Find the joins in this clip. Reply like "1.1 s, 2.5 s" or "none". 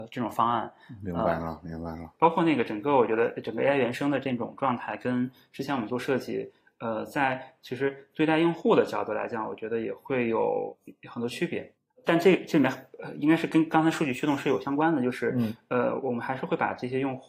none